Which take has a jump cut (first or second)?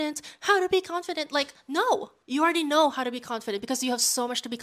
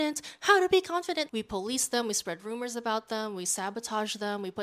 second